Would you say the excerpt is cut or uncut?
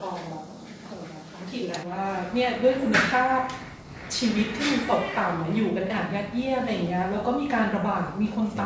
cut